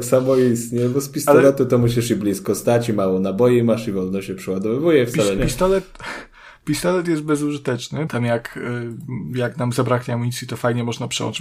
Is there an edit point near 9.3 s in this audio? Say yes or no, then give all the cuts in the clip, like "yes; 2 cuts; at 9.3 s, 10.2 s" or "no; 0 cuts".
no; 2 cuts; at 5.4 s, 8.1 s